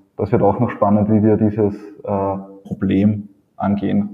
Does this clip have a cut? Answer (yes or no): yes